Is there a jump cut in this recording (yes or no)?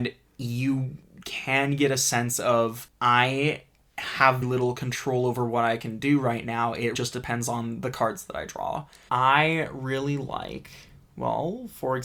yes